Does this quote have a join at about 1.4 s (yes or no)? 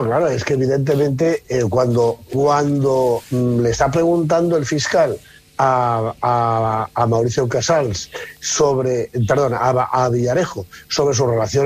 yes